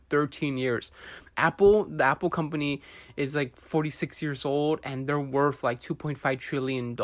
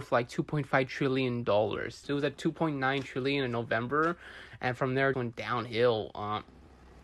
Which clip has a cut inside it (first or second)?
second